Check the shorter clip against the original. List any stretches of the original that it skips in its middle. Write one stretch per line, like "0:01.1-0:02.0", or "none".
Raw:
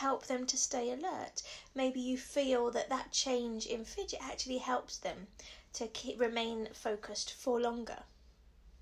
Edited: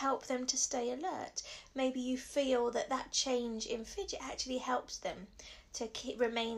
none